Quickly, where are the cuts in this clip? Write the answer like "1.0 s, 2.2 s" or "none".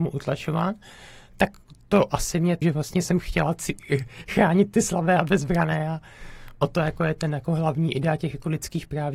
2.6 s